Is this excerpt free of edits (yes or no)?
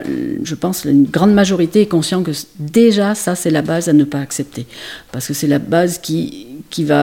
yes